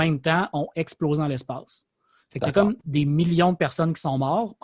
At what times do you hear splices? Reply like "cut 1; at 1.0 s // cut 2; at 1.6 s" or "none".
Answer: none

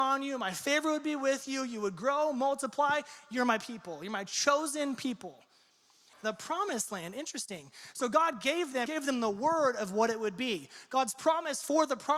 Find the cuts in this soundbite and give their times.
cut 1; at 6.1 s // cut 2; at 8.9 s

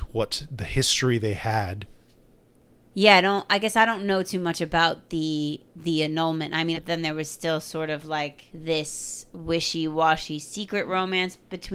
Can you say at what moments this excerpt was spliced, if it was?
cut 1; at 6.7 s // cut 2; at 8.5 s

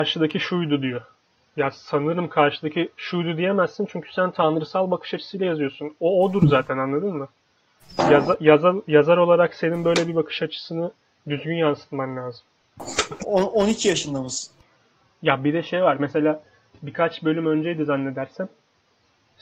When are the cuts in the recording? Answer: cut 1; at 13.2 s

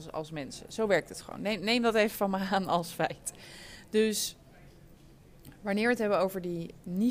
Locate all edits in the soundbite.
none

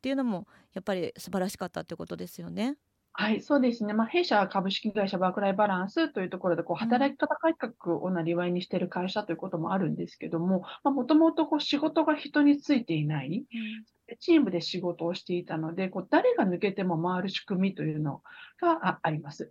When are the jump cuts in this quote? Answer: none

